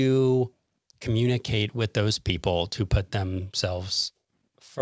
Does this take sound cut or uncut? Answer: uncut